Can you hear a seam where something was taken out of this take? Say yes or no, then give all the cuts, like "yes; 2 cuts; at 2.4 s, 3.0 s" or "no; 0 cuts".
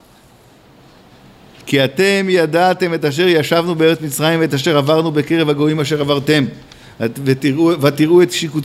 no; 0 cuts